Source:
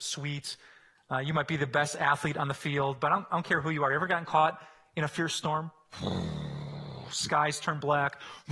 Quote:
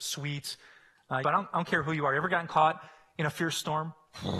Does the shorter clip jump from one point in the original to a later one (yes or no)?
yes